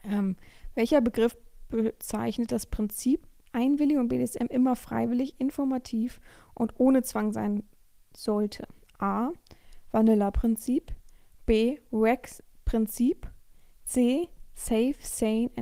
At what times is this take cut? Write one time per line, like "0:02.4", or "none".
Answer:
0:03.4